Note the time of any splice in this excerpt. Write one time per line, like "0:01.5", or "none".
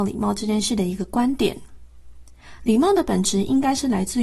0:02.6